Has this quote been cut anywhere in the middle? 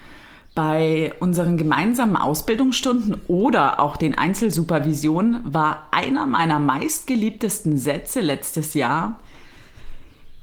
no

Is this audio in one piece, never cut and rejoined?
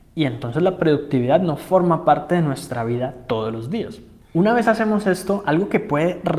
yes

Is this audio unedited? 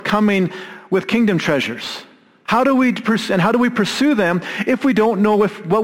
no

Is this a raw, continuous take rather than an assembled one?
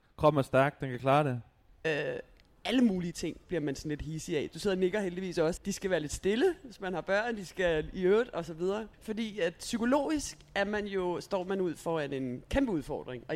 no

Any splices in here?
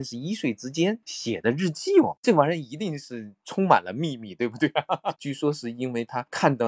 yes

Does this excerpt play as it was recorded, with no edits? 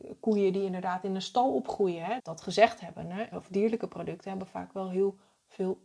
no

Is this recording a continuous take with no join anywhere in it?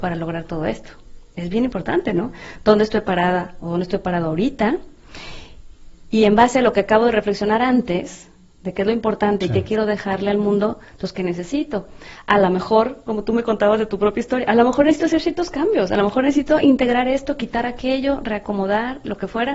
yes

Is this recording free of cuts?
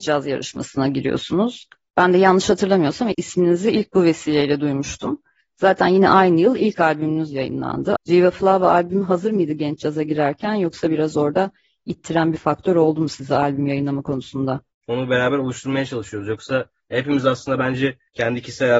no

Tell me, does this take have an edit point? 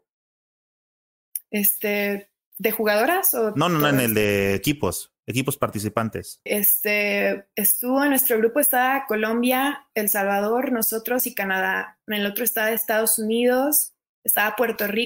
yes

